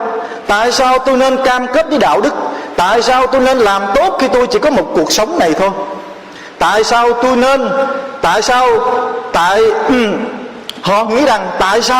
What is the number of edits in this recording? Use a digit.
1